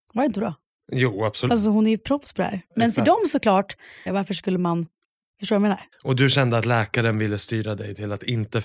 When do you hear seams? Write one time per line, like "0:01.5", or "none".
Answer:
0:01.5
0:04.1